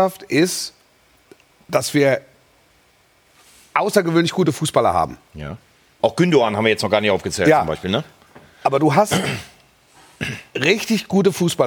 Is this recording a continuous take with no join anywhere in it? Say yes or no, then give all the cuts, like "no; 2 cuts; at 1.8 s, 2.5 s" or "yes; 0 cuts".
no; 1 cut; at 6.0 s